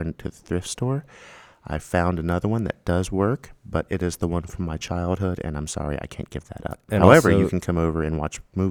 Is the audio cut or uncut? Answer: uncut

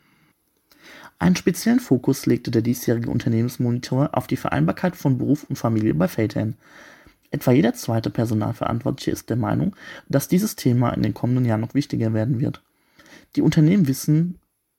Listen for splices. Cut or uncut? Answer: uncut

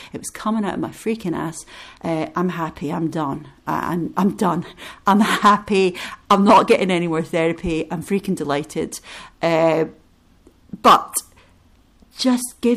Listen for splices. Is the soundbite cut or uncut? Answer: uncut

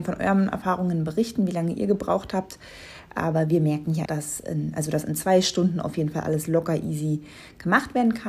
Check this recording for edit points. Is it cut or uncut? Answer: cut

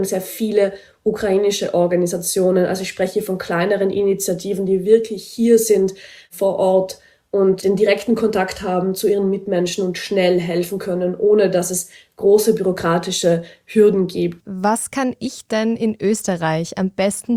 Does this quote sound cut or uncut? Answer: cut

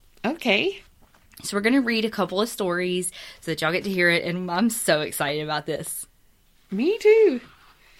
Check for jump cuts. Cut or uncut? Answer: uncut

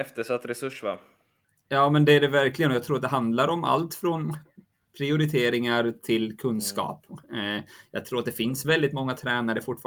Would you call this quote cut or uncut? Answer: uncut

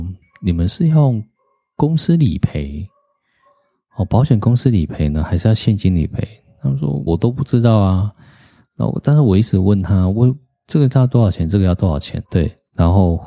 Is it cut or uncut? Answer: cut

